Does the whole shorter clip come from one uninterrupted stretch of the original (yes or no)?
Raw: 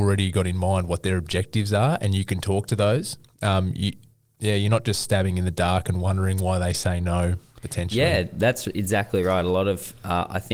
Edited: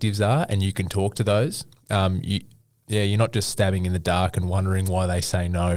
yes